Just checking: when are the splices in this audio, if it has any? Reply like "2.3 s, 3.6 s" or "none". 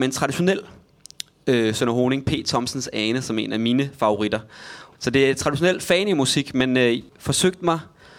4.9 s, 7.1 s